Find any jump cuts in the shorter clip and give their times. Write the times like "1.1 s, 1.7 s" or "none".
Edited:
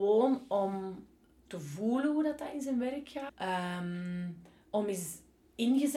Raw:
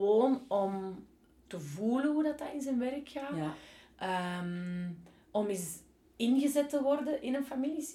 3.3 s